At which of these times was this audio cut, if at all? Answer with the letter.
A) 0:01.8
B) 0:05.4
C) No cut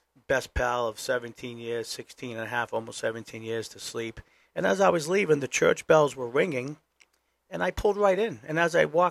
C